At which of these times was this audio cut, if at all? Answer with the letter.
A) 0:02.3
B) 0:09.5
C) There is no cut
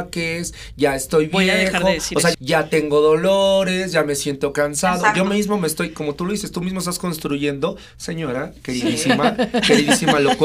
A